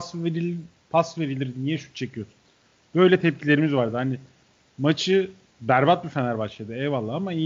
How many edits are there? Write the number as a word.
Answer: zero